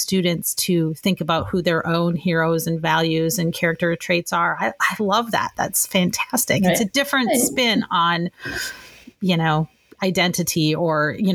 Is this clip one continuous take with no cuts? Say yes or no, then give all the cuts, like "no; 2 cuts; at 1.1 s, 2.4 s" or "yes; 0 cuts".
yes; 0 cuts